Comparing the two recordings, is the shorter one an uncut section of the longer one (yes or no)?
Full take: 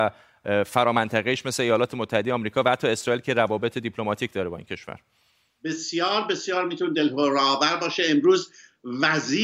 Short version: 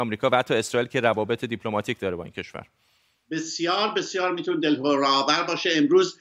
yes